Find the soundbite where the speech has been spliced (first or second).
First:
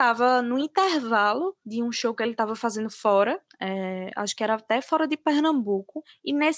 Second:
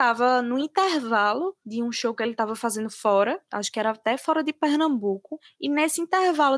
second